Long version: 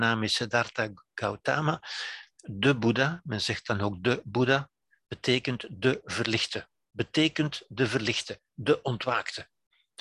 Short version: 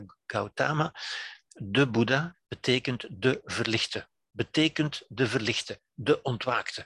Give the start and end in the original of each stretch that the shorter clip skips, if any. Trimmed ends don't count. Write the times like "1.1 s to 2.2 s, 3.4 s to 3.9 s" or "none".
3.2 s to 4.9 s